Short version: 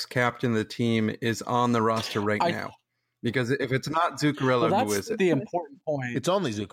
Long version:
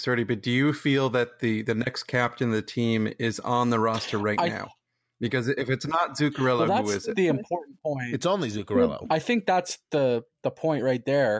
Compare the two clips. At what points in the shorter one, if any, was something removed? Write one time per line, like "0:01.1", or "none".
none